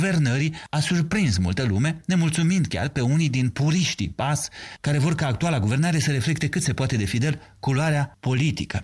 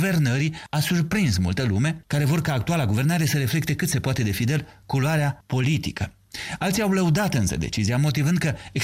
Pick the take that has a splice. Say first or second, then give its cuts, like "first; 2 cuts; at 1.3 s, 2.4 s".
second; 1 cut; at 2.0 s